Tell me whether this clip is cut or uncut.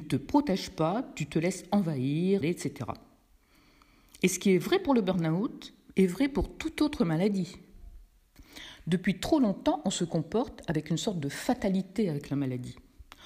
cut